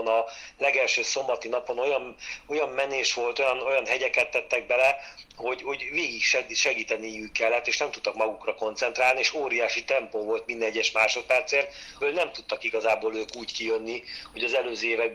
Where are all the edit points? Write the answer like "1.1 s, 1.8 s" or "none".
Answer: 12.0 s